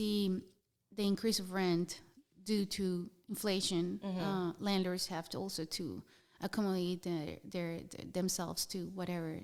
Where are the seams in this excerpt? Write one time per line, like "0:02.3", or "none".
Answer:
none